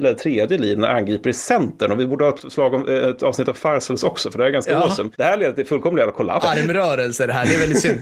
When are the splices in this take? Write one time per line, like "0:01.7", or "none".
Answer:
0:06.4